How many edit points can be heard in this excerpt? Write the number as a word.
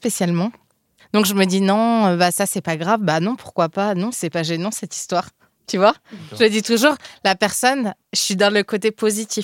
two